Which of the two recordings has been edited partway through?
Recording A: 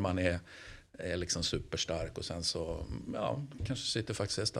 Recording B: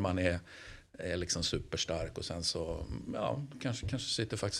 A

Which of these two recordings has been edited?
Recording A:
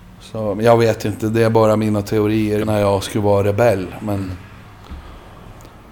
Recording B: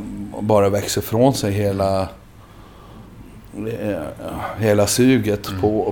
A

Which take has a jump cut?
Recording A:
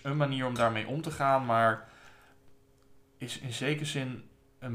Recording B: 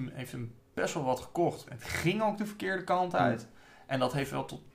B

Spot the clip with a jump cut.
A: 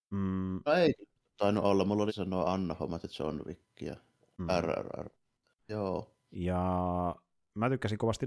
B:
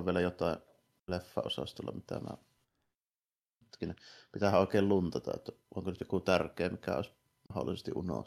A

